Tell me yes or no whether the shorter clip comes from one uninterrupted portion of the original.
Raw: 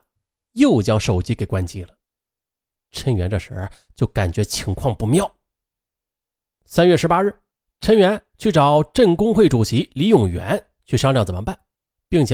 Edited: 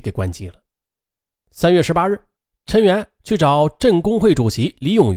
no